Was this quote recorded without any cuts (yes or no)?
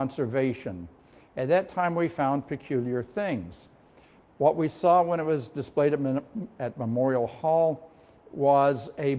yes